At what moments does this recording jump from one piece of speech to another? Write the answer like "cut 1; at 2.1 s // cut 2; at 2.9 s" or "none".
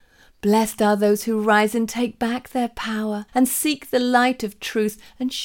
cut 1; at 3.3 s